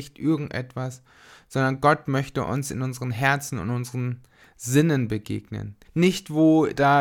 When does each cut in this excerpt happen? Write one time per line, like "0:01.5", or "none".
0:05.9

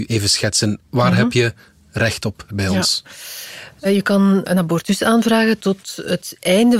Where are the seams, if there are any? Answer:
0:02.5

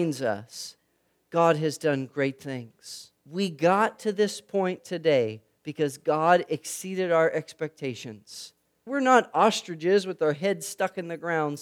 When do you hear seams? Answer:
0:03.2
0:08.9

